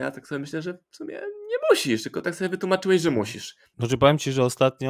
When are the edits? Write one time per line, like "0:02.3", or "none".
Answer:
0:03.7